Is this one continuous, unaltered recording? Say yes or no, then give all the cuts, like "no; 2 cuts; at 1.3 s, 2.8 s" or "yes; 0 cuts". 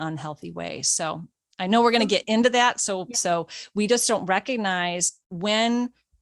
no; 1 cut; at 3.1 s